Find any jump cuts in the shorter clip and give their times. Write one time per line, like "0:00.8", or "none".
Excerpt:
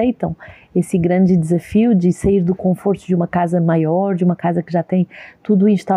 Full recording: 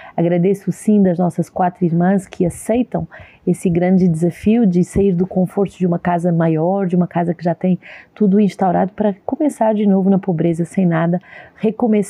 none